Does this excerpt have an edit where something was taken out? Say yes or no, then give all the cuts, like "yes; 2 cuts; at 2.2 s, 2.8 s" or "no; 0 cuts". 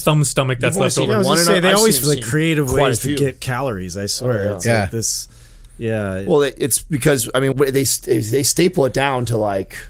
yes; 2 cuts; at 2.0 s, 7.5 s